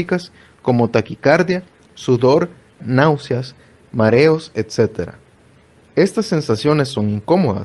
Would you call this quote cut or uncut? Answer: cut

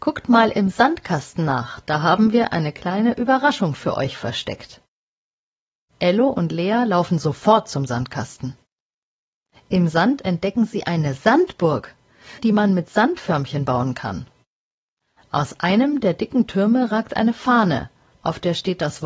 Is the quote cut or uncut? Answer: cut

